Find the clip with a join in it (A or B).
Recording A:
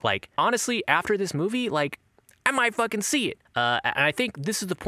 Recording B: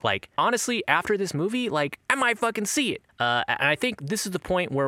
B